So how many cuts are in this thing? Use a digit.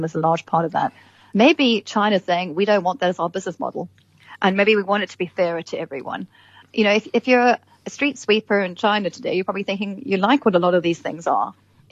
0